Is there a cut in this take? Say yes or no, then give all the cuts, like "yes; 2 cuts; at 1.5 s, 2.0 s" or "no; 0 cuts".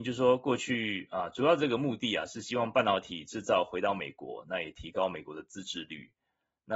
no; 0 cuts